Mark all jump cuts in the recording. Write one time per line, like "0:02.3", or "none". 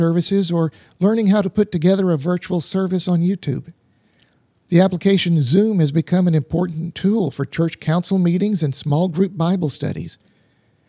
none